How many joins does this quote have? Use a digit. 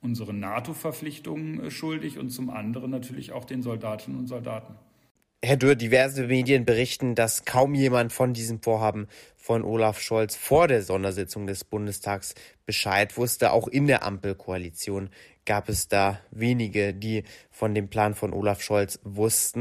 0